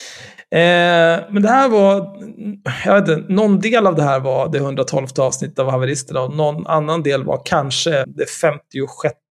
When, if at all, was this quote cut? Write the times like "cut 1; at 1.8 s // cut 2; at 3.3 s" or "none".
cut 1; at 8.0 s